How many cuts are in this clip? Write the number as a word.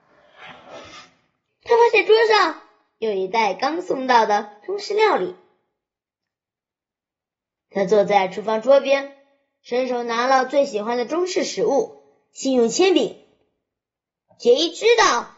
one